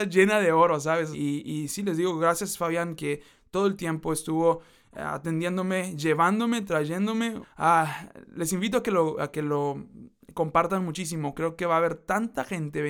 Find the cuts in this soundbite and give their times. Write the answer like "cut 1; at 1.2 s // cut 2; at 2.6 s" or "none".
cut 1; at 1.1 s // cut 2; at 7.4 s